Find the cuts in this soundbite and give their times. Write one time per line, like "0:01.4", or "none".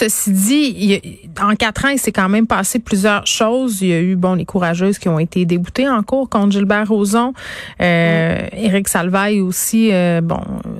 none